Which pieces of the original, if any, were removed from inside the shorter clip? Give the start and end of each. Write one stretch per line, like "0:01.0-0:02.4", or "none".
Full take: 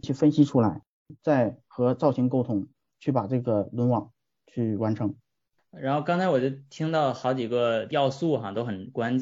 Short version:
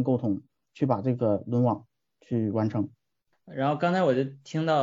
none